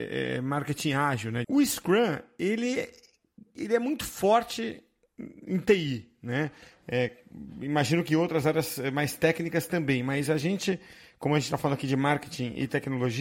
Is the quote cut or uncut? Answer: cut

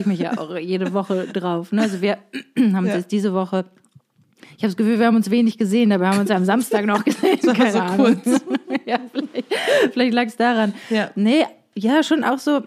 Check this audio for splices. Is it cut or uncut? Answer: uncut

